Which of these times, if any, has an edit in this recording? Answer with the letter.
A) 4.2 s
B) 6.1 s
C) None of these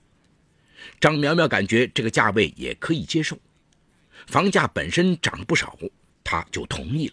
B